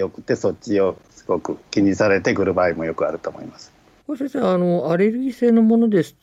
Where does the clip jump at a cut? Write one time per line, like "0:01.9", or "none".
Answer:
0:01.7
0:04.0